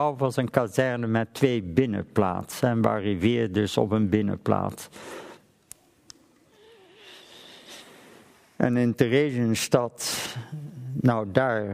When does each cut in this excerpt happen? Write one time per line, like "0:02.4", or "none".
0:05.4